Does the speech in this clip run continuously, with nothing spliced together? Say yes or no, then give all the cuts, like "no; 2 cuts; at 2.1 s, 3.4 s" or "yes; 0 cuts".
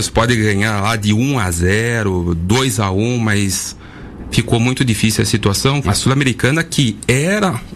no; 1 cut; at 5.8 s